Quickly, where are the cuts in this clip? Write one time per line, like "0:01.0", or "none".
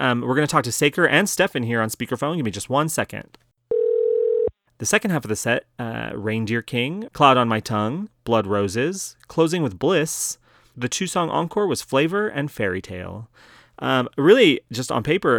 0:04.7
0:07.1

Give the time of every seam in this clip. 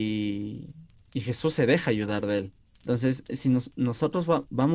0:02.7

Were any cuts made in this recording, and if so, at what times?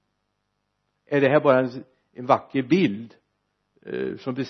none

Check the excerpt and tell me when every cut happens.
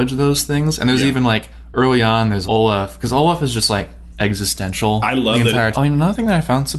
0:02.5
0:05.7

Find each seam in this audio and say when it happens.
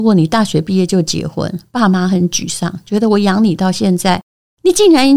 none

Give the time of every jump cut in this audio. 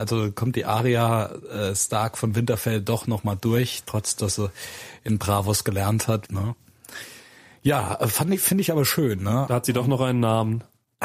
0:06.3
0:09.5

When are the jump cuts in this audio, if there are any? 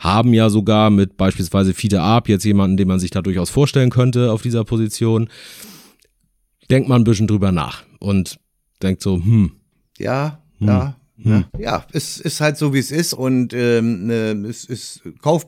0:11.5
0:13.1

